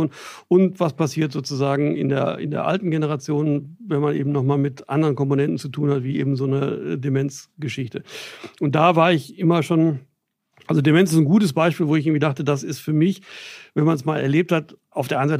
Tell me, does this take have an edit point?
no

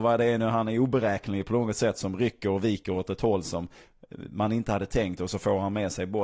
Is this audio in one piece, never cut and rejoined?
yes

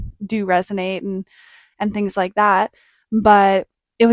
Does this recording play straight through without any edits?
yes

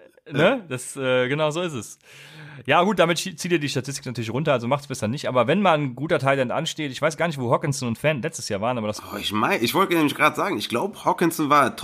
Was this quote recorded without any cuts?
yes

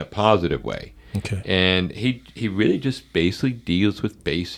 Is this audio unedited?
yes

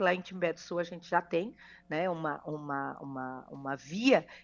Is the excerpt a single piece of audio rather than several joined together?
yes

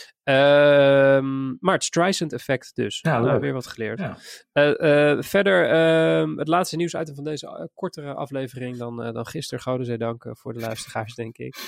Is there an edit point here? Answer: no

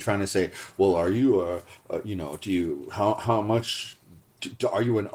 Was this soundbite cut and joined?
no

